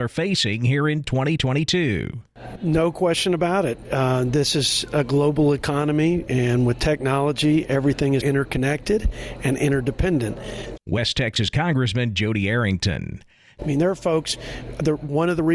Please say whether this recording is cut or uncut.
cut